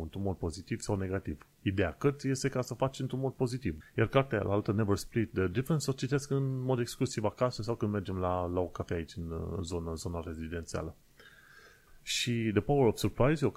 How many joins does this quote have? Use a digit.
2